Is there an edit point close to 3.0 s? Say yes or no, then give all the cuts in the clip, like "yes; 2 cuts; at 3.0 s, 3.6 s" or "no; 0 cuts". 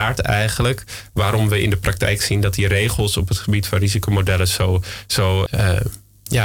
no; 1 cut; at 5.5 s